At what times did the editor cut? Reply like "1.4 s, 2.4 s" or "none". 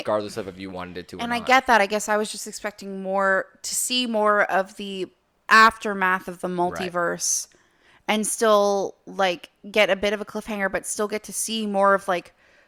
none